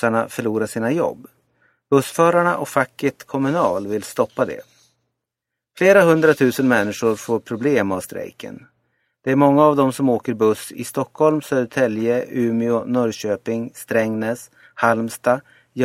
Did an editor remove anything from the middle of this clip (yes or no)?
no